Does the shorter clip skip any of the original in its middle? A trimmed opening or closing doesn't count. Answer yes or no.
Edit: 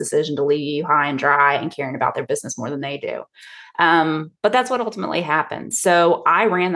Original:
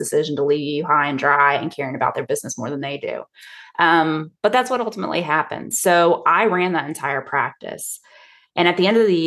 no